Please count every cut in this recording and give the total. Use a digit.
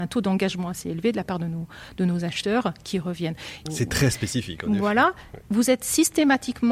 1